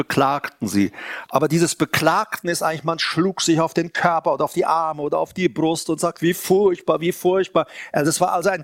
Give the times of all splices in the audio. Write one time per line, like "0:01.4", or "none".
0:01.3